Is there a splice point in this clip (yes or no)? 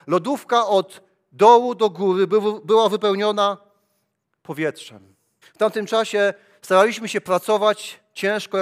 yes